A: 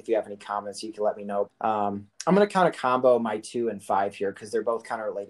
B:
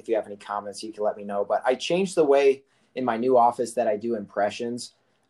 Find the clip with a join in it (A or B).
A